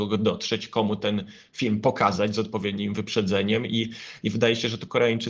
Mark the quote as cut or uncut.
uncut